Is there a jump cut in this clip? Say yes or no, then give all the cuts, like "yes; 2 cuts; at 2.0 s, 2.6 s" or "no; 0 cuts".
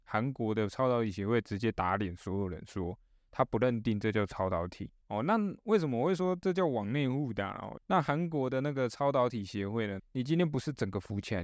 yes; 3 cuts; at 5.0 s, 7.8 s, 10.0 s